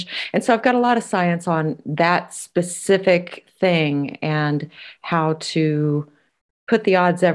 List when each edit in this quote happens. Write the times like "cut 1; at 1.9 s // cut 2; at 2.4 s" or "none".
none